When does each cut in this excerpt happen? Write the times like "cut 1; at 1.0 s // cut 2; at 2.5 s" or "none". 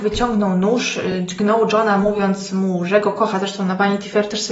none